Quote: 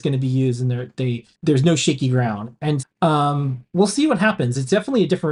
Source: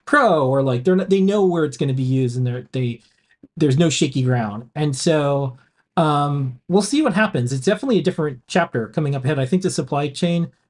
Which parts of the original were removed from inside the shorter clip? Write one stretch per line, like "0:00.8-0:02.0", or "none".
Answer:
0:03.1-0:03.5
0:05.0-0:05.8

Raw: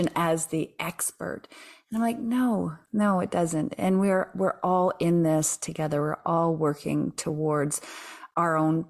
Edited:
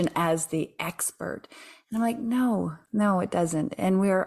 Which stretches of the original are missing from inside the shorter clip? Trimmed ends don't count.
none

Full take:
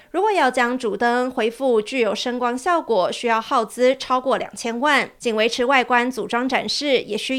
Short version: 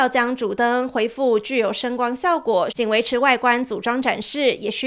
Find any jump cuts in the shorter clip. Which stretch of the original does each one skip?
0:03.1-0:05.2

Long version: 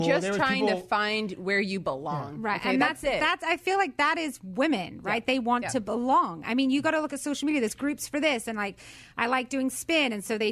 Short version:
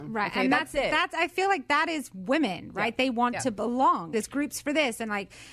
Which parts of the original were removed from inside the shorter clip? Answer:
0:06.4-0:07.6

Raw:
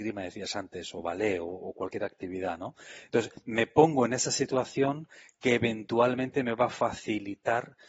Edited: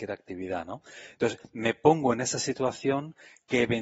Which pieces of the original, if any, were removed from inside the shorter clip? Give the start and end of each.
none

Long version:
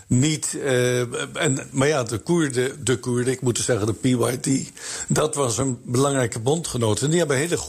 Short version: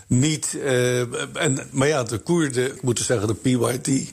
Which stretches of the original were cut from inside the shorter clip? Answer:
0:02.8-0:03.4

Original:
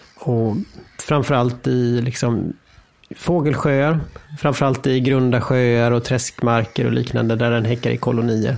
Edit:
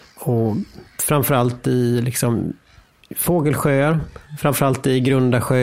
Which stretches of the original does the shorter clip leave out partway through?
none

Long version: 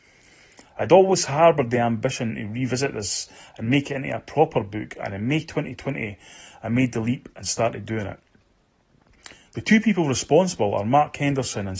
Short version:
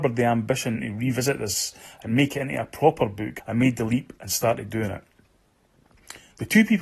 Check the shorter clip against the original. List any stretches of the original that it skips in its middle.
0:04.9-0:06.6

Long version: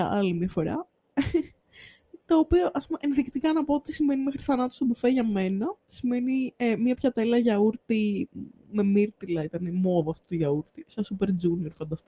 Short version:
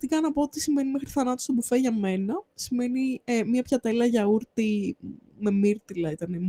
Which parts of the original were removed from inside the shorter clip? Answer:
none

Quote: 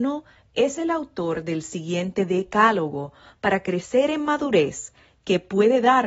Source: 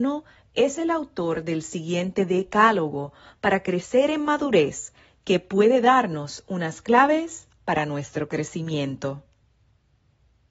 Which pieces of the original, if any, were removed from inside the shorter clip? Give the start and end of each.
none

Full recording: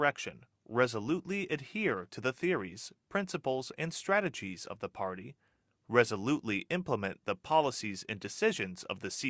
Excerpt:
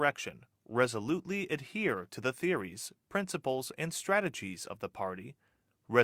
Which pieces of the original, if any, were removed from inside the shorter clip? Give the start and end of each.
none

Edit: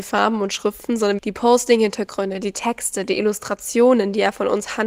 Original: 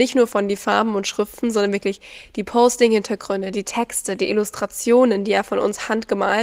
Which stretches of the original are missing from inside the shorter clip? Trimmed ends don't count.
0:01.7-0:02.3

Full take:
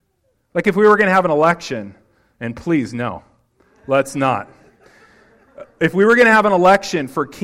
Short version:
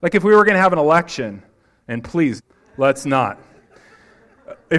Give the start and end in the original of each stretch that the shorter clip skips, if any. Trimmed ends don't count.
0:02.9-0:03.5

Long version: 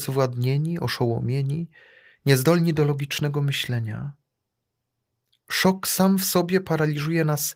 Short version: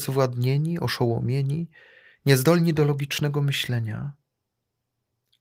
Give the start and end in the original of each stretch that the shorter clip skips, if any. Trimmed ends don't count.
none

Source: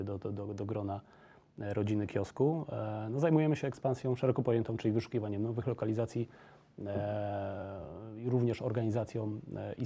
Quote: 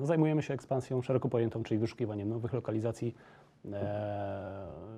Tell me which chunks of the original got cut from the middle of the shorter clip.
none

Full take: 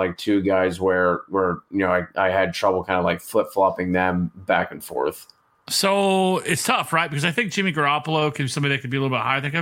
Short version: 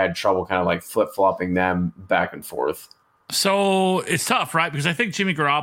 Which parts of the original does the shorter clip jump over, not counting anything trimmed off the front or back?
none

